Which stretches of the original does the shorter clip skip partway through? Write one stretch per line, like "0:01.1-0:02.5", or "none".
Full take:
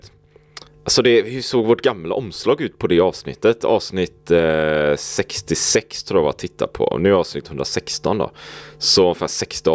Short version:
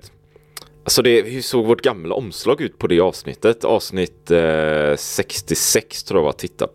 none